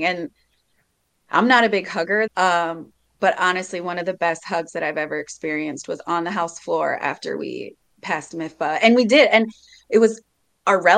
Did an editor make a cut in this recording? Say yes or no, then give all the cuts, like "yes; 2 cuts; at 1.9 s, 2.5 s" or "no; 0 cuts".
yes; 1 cut; at 2.3 s